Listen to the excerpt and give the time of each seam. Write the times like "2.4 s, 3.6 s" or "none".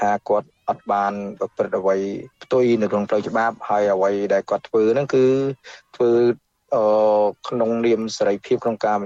2.3 s